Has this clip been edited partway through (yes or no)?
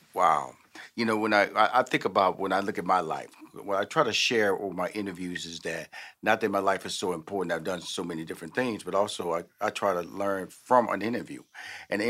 no